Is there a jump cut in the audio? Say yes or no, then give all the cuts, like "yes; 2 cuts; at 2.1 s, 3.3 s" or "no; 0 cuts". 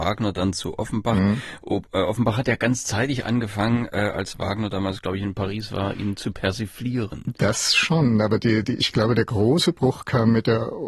no; 0 cuts